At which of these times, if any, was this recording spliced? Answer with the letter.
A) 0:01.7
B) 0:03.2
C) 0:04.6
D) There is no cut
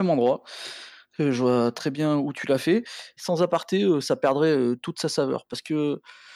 B